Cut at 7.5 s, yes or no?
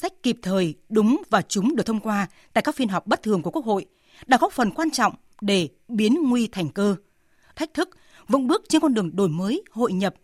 yes